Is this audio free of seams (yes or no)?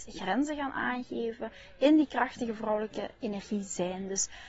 yes